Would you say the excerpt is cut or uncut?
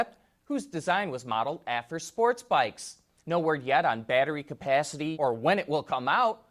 cut